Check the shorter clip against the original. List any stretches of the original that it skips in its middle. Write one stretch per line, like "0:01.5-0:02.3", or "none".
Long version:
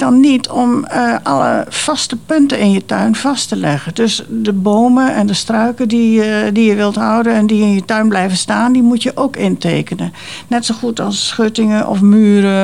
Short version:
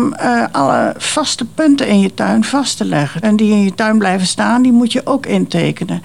0:03.9-0:07.3